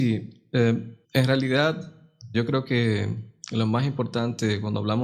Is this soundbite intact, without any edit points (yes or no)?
no